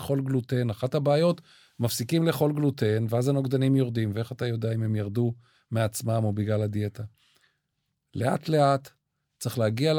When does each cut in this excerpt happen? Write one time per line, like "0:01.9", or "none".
none